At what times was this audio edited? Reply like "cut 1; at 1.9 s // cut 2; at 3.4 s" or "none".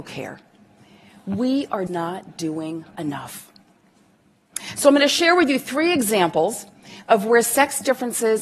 cut 1; at 1.9 s

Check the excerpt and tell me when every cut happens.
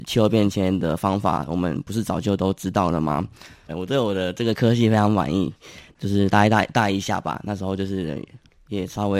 cut 1; at 3.7 s // cut 2; at 6.0 s

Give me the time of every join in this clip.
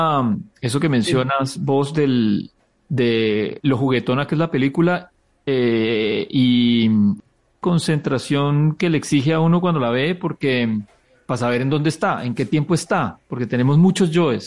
none

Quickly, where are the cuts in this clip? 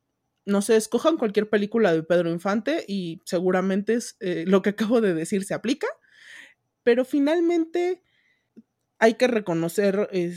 cut 1; at 6.7 s

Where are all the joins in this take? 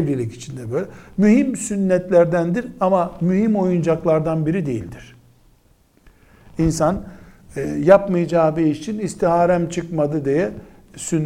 none

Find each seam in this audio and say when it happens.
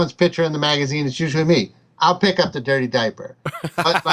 none

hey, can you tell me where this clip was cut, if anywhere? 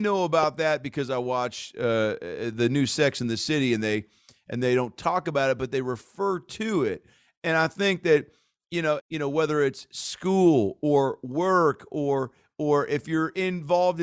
cut 1; at 9.0 s

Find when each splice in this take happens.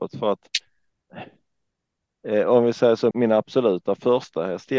cut 1; at 3.1 s

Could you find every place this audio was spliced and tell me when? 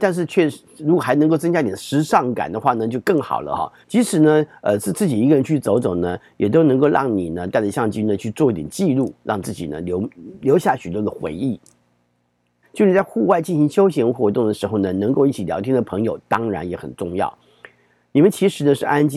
cut 1; at 3.8 s // cut 2; at 12.6 s

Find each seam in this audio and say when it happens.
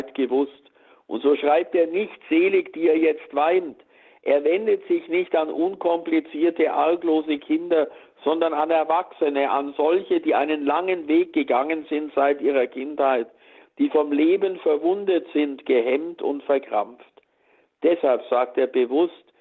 none

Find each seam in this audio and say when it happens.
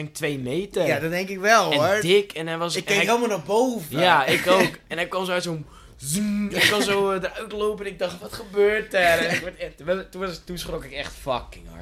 none

